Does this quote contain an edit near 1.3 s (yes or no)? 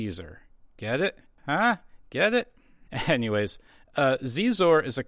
no